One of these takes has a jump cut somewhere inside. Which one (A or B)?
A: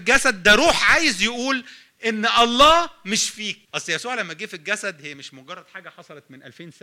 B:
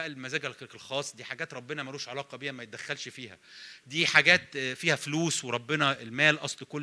A